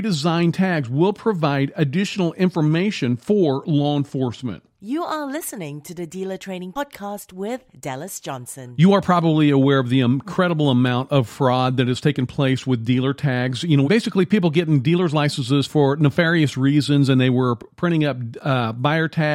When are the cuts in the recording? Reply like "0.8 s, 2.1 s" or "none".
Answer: 13.8 s